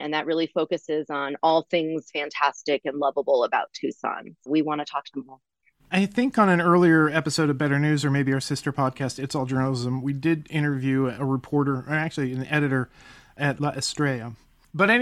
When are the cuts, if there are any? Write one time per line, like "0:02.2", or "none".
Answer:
0:04.5

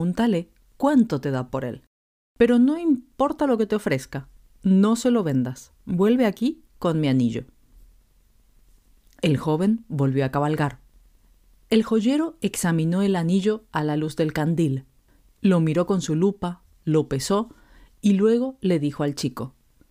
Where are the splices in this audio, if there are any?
none

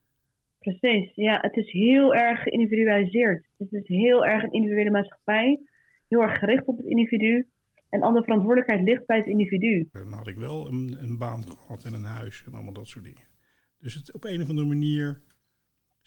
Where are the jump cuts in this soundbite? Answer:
0:09.9

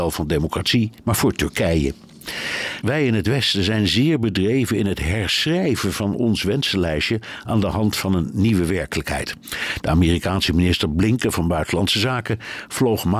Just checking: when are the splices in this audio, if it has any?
0:01.0
0:02.8
0:09.8

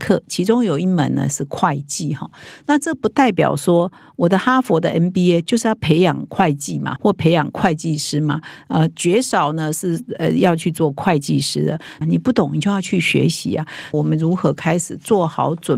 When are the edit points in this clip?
0:07.0
0:12.0
0:13.9

